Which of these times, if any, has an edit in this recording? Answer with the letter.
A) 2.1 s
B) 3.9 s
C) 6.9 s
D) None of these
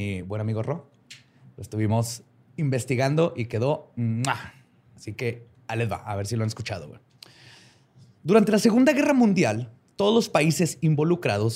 D